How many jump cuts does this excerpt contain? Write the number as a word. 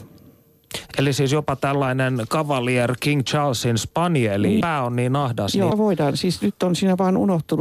two